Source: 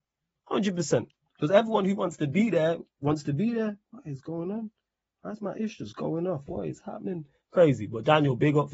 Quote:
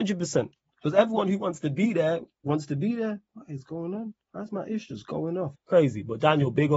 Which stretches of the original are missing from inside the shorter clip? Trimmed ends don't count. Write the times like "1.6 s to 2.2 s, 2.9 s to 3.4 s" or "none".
4.8 s to 5.1 s, 6.4 s to 7.4 s

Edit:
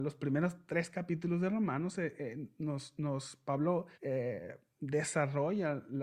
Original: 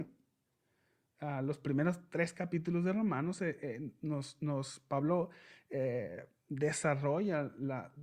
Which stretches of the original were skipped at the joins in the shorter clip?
5.4 s to 5.6 s

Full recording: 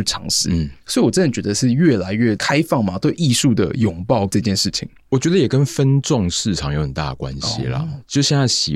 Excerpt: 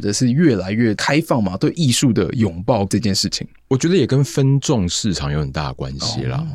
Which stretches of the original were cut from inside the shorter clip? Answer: none

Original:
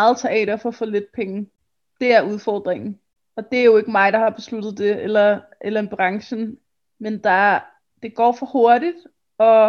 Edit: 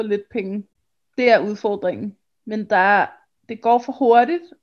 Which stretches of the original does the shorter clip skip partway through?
3.1 s to 6.8 s

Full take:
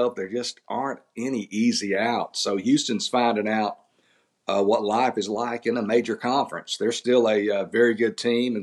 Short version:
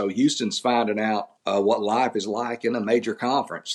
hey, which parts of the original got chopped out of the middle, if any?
3.8 s to 4.4 s

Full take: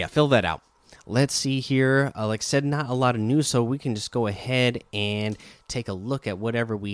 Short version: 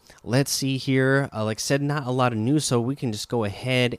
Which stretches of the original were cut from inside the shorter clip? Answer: none

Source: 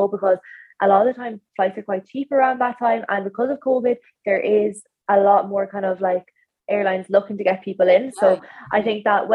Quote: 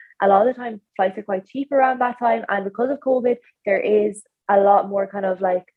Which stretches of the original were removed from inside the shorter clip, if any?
none

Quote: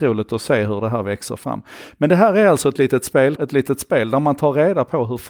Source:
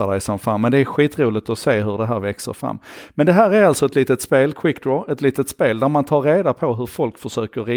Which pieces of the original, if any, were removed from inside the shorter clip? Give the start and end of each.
4.5 s to 5.1 s

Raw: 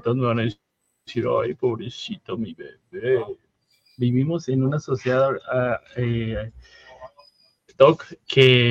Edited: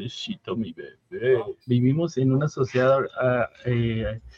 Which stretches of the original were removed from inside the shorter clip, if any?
3.4 s to 3.9 s

